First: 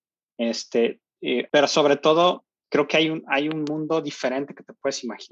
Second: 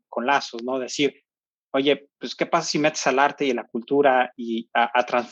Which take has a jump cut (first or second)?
first